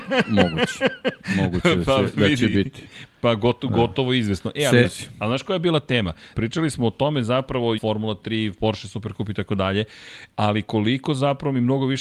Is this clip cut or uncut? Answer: cut